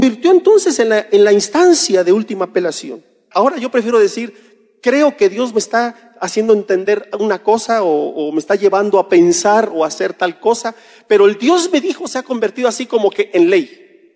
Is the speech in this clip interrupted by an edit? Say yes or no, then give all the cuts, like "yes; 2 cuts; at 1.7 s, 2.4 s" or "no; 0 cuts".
yes; 1 cut; at 3.3 s